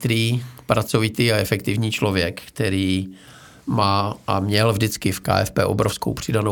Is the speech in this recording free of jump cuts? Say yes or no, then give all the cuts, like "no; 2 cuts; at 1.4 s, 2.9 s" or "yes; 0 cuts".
yes; 0 cuts